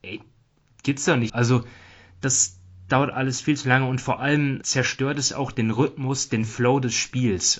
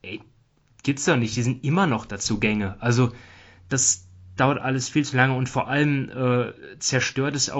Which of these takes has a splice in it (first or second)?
first